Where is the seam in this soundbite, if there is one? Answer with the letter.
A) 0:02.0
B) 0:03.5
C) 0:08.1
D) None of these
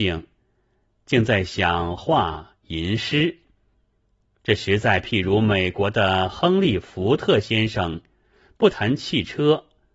A